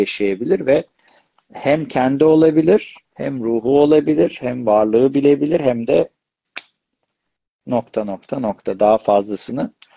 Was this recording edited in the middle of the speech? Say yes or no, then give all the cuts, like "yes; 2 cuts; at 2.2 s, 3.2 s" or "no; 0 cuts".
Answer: no; 0 cuts